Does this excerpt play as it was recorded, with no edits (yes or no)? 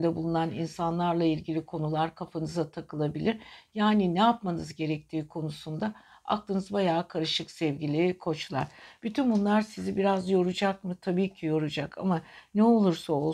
yes